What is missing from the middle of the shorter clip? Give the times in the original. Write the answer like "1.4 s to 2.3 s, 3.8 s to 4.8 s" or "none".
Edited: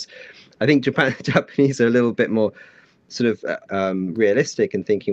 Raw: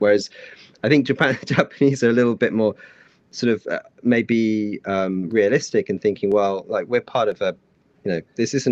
3.9 s to 4.8 s